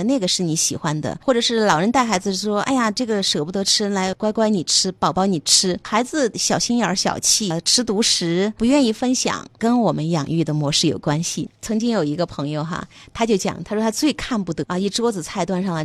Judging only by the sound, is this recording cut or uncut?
uncut